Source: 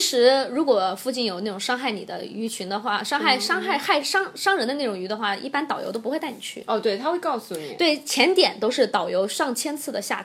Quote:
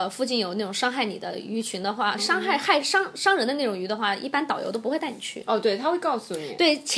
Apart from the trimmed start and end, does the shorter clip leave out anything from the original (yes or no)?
yes